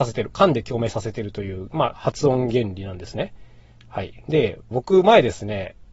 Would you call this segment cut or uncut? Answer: cut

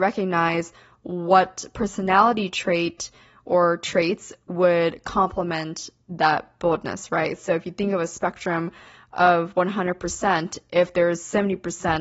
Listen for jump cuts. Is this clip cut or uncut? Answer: uncut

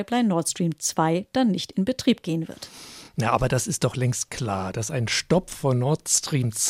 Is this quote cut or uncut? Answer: uncut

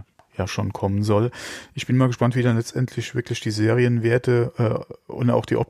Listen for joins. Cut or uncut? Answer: uncut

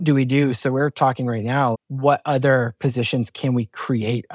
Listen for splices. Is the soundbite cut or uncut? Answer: cut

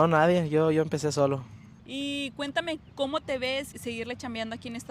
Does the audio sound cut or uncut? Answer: cut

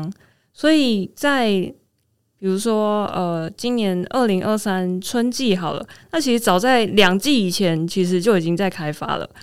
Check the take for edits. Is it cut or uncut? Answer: uncut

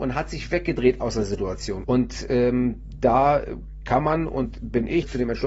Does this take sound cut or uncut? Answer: cut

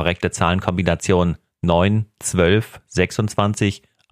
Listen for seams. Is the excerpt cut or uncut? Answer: uncut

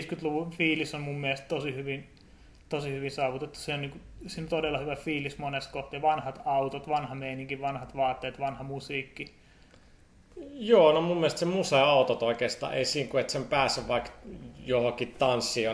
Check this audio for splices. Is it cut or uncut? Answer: uncut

